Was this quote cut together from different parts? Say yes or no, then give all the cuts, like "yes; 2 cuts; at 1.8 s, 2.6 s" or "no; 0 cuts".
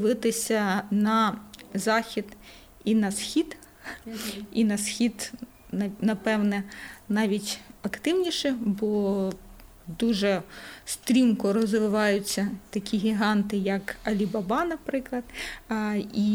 no; 0 cuts